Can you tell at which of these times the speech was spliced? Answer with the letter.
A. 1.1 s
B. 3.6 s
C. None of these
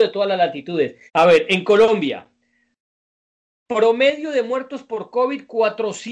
A